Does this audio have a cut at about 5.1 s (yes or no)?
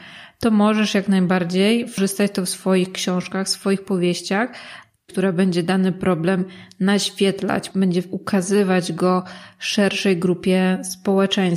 yes